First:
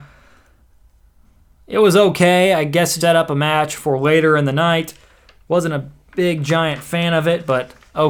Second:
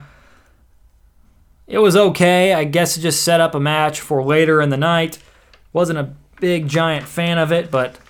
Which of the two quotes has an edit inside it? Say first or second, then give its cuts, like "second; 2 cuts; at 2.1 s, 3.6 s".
first; 1 cut; at 3.0 s